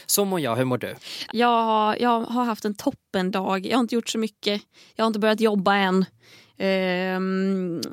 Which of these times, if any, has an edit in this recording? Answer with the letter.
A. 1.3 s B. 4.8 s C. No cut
A